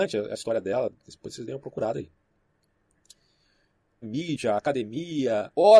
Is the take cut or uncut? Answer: cut